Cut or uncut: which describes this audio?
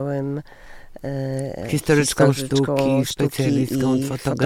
uncut